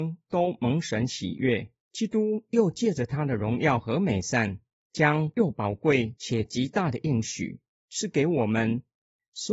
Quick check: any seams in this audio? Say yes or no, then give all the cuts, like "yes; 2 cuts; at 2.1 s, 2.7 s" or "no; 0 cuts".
yes; 1 cut; at 1.8 s